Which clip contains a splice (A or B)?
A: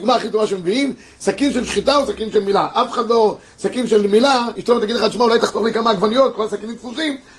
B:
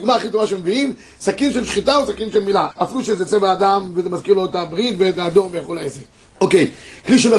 B